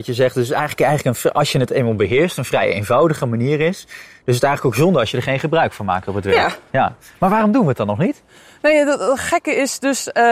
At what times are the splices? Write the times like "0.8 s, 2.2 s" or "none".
none